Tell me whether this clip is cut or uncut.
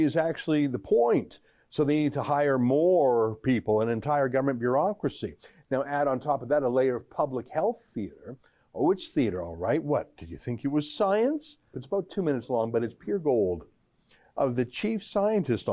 cut